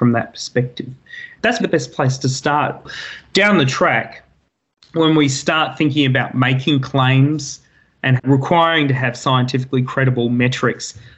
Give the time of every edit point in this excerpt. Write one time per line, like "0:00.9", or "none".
0:01.6